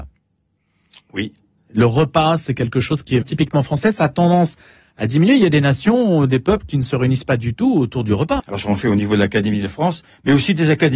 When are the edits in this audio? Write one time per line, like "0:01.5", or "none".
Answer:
0:03.2
0:08.4